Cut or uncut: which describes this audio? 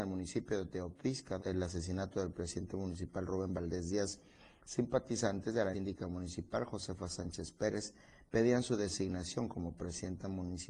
cut